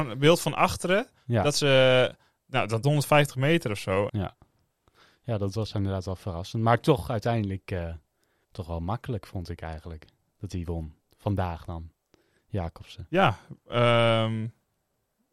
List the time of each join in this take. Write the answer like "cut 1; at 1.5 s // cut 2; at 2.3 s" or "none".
cut 1; at 2.8 s // cut 2; at 4.1 s // cut 3; at 8.4 s